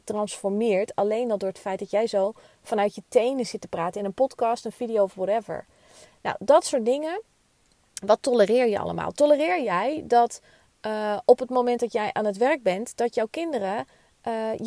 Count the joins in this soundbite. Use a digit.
0